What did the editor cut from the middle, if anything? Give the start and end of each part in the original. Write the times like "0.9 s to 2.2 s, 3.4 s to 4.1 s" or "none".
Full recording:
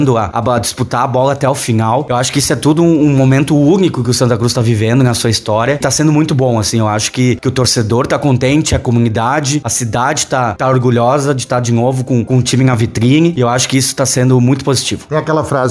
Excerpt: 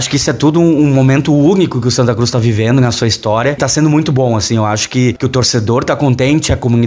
none